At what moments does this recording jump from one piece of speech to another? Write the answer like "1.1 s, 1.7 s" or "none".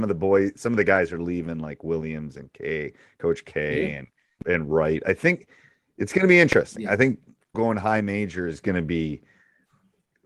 4.4 s, 7.5 s